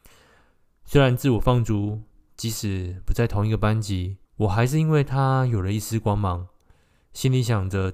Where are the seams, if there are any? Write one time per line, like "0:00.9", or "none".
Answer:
0:04.3

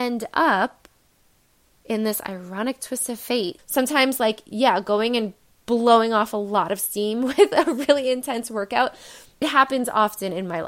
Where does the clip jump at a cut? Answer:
0:03.6
0:09.4

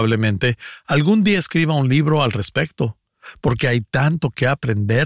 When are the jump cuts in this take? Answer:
none

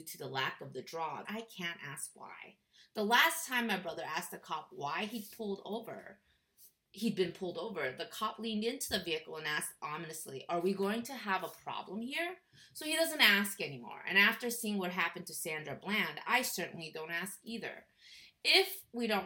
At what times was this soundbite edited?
0:01.2

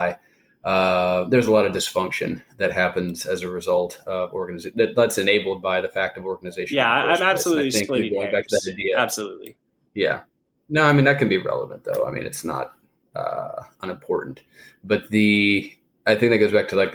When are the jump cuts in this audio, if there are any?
none

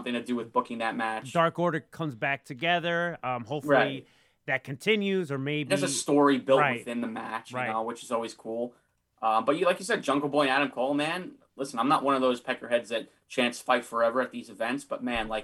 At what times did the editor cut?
none

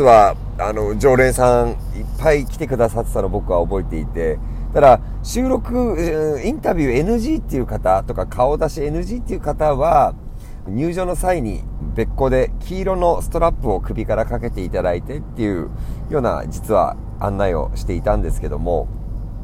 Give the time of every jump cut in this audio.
0:10.7
0:11.8

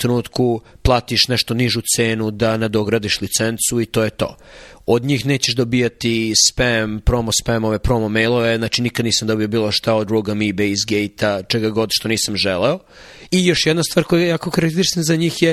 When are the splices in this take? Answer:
0:13.3

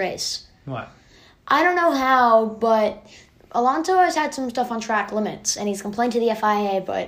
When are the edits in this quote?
none

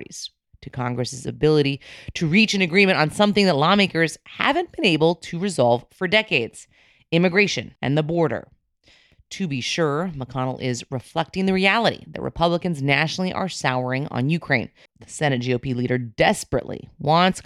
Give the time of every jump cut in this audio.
0:07.8
0:14.9

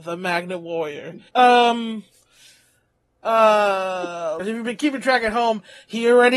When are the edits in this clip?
0:01.3
0:04.4

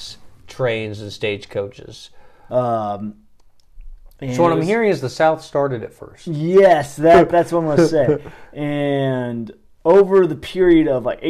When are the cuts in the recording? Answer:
0:02.5

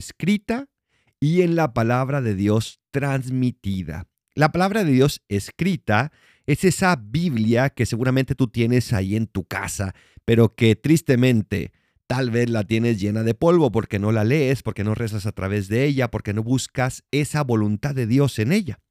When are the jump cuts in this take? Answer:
none

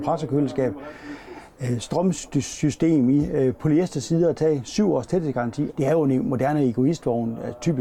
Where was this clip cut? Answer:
0:05.7

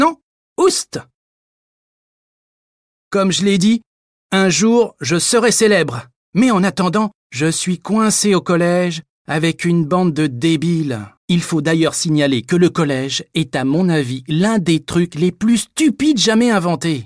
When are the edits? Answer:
0:07.2
0:11.2

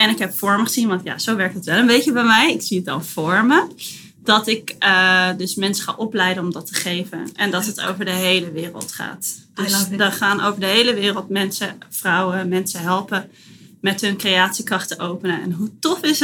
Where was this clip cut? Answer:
none

